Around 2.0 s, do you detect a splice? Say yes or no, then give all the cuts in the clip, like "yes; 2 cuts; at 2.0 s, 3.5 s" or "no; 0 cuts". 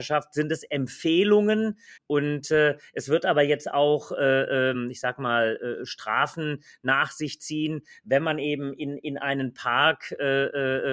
yes; 2 cuts; at 2.0 s, 4.7 s